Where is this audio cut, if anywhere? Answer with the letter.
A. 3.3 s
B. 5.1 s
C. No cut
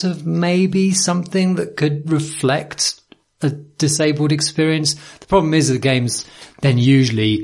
C